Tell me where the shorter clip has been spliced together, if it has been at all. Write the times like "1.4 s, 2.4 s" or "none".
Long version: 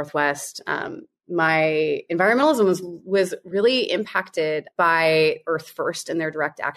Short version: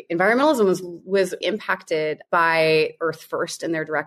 1.4 s